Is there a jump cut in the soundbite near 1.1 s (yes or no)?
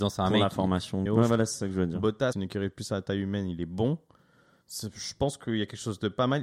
yes